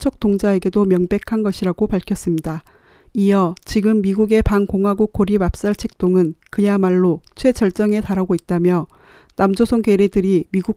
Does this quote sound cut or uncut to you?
cut